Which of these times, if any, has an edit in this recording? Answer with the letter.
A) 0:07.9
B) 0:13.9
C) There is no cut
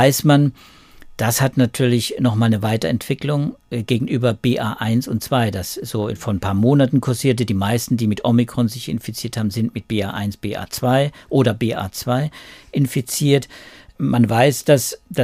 C